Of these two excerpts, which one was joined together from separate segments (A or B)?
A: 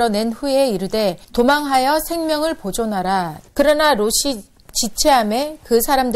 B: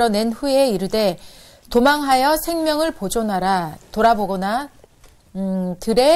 A